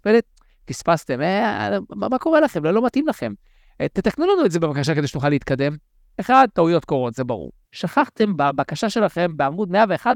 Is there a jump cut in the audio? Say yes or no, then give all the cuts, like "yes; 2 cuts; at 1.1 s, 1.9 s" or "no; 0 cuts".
yes; 2 cuts; at 6.1 s, 7.6 s